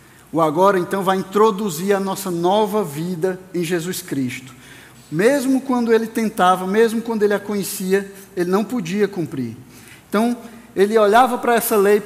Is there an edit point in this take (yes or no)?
yes